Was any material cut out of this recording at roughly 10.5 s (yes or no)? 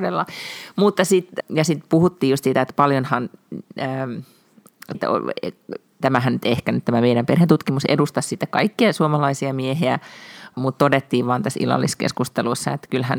yes